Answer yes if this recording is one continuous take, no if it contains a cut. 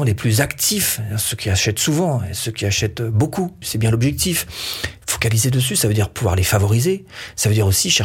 no